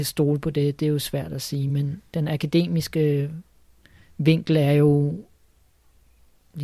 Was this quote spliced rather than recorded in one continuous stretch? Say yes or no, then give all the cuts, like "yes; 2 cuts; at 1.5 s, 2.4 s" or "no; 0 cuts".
no; 0 cuts